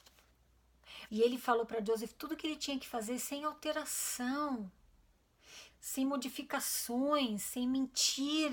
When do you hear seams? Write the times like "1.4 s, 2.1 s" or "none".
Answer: 1.1 s, 5.7 s